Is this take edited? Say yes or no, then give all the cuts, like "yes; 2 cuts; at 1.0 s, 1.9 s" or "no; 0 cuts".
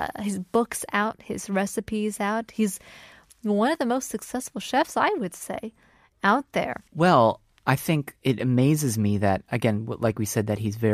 yes; 1 cut; at 6.9 s